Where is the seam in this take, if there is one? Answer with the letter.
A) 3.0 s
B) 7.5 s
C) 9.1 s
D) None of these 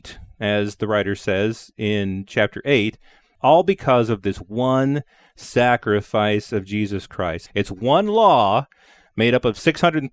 B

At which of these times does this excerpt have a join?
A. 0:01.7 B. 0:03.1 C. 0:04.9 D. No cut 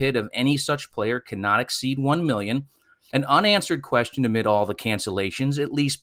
B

